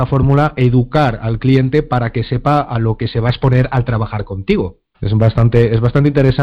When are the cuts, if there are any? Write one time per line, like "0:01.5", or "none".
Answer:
0:04.9